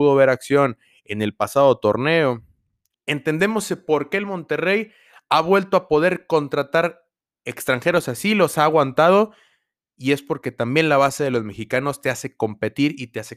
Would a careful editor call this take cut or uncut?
cut